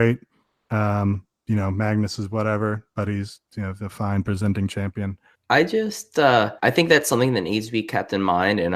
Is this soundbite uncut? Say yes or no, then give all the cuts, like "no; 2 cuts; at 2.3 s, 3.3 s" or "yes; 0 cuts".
no; 2 cuts; at 5.3 s, 6.6 s